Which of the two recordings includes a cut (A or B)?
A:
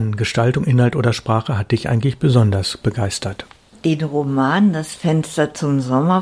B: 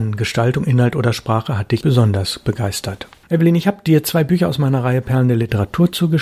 B